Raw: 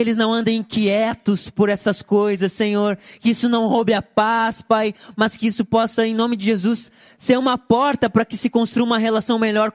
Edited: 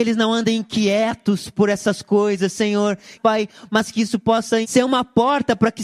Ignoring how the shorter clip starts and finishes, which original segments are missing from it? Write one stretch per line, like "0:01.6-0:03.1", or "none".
0:03.2-0:04.6
0:06.1-0:07.2